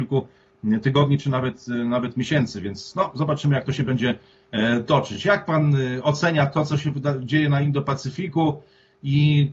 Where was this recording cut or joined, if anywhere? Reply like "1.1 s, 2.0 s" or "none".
none